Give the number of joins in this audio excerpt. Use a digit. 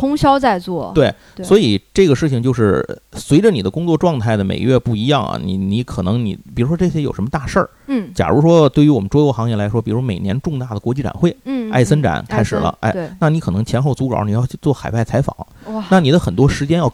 0